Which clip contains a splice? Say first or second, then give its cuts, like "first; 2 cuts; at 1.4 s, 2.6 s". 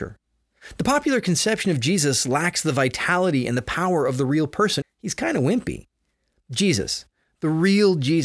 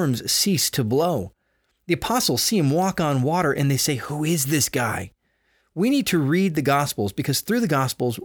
first; 2 cuts; at 4.8 s, 6.4 s